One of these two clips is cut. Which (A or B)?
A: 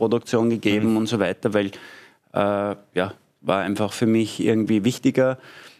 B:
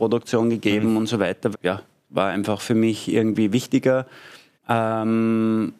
B